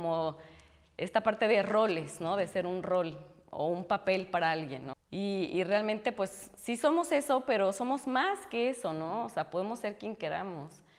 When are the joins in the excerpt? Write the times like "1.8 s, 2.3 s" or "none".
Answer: 4.9 s